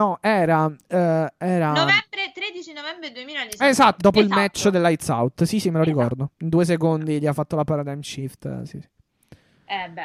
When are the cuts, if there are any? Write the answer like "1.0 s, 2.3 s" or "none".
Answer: 4.0 s